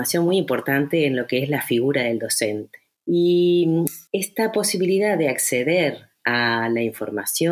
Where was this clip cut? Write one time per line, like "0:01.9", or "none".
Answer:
0:02.9
0:04.1